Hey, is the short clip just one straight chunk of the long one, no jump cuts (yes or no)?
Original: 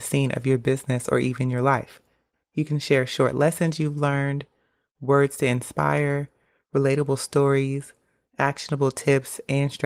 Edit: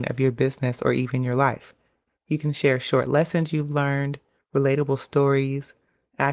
no